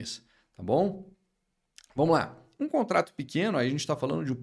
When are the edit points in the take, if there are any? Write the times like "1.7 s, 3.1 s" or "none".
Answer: 2.6 s

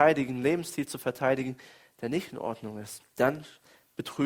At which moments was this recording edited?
3.1 s

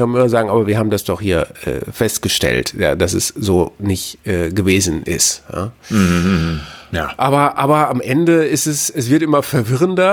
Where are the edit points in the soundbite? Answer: none

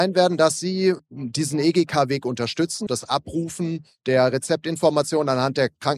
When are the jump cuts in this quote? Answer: 2.9 s

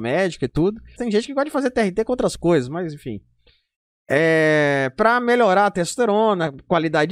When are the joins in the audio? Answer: 1.0 s

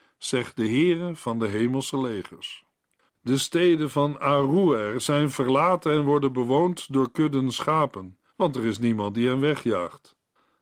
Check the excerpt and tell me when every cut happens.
3.1 s, 8.3 s

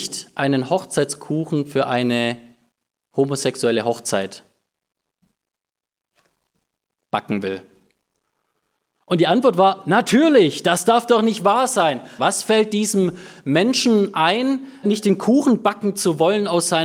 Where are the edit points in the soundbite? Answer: 12.2 s, 14.8 s

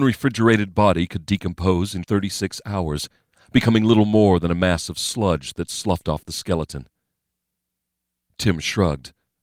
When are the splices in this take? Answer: 2.0 s

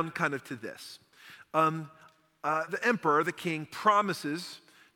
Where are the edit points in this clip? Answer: 2.7 s

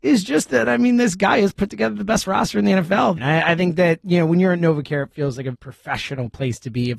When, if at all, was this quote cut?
3.2 s, 5.5 s

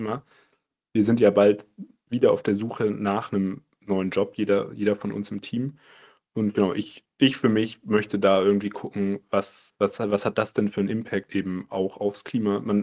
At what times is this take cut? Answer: 9.7 s, 11.3 s

